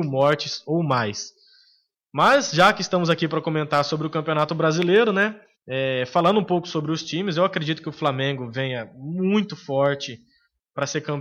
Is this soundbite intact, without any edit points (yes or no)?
yes